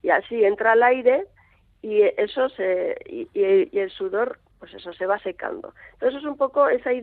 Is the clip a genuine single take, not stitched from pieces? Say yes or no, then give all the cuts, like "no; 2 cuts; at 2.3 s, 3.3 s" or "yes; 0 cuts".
yes; 0 cuts